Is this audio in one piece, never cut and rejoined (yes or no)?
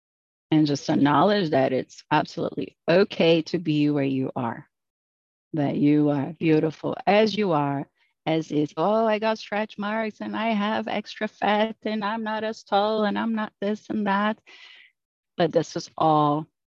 no